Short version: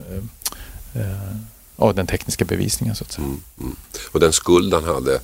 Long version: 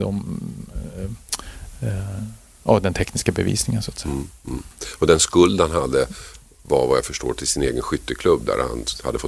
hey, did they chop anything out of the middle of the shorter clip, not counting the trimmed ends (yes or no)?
no